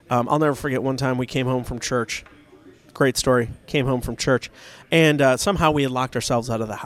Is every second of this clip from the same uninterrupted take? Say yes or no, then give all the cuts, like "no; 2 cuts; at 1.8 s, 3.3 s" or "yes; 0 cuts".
yes; 0 cuts